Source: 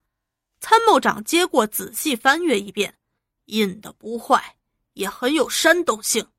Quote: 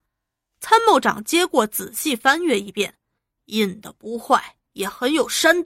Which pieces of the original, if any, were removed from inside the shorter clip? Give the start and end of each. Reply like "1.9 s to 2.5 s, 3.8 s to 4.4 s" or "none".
4.7 s to 4.9 s

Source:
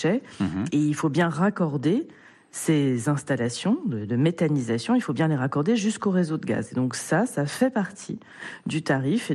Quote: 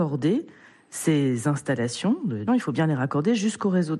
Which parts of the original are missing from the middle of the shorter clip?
4.1 s to 4.9 s

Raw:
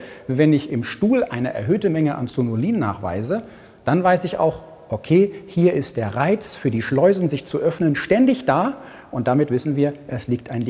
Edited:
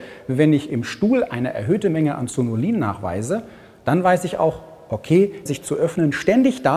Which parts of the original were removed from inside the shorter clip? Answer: 5.5 s to 7.3 s

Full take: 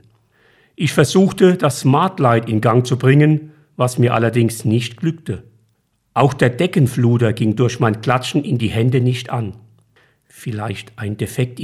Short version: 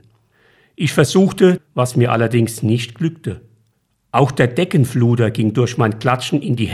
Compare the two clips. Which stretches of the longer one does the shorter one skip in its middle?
1.6 s to 3.6 s

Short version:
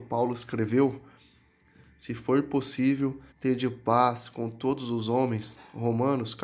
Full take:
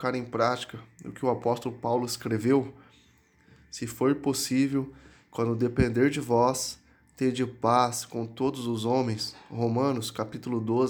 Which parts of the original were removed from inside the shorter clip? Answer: 5.0 s to 7.1 s

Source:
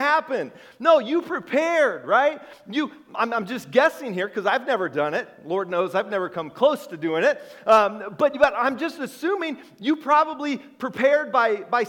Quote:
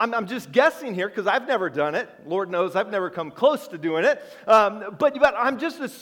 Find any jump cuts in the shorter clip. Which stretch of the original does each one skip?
none

